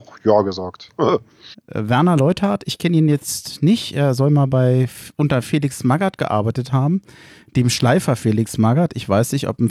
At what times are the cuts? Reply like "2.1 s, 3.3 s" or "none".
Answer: 1.5 s